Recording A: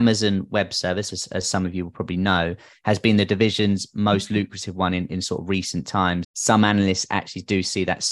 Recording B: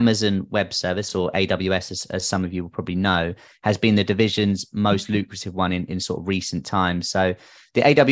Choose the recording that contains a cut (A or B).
A